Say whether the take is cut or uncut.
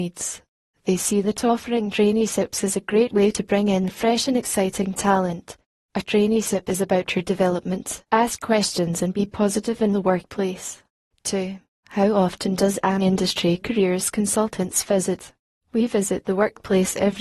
cut